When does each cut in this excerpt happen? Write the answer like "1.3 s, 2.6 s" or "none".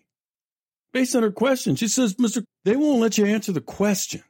2.4 s